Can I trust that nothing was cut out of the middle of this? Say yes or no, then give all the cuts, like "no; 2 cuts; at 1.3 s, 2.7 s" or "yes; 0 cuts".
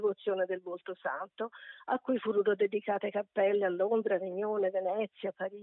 yes; 0 cuts